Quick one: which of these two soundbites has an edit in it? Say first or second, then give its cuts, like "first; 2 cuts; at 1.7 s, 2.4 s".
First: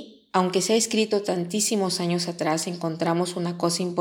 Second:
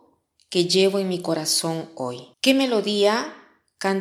second; 1 cut; at 2.3 s